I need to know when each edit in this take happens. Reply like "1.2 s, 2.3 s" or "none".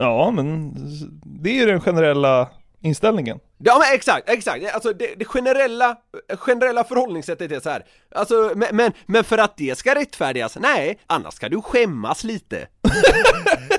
8.0 s, 11.0 s